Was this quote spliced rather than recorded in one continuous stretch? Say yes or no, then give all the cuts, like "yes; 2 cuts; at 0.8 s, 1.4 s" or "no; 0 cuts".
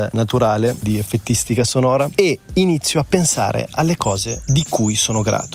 no; 0 cuts